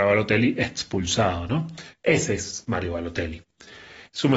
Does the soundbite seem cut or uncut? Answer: uncut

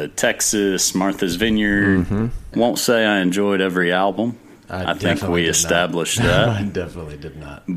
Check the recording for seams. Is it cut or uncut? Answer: cut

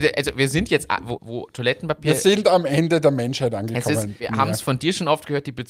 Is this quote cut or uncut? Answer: cut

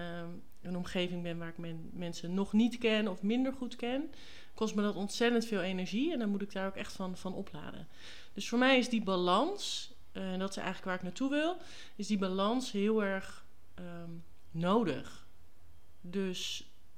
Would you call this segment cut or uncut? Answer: uncut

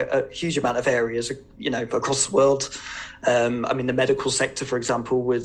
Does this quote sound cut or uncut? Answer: uncut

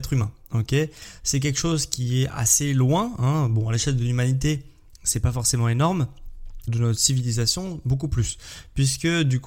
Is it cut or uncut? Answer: cut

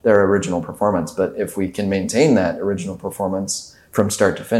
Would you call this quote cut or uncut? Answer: uncut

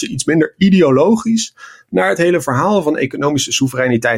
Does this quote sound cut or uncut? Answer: uncut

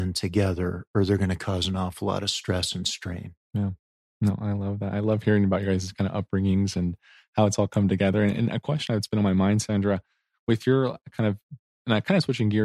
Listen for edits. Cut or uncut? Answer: uncut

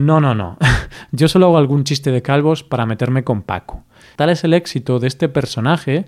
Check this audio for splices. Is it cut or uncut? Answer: cut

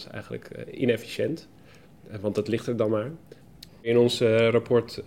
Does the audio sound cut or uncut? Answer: cut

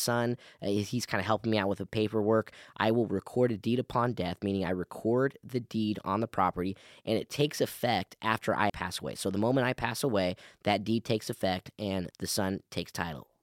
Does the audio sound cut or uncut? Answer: cut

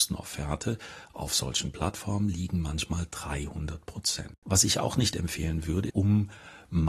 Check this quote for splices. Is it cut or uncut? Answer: cut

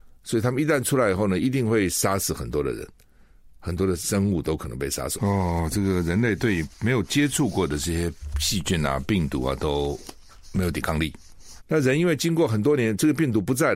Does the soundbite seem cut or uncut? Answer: cut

